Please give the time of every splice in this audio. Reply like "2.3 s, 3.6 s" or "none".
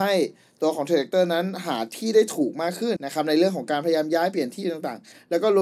3.0 s